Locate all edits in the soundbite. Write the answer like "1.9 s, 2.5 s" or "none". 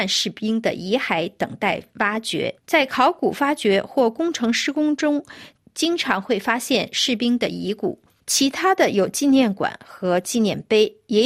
2.6 s, 8.2 s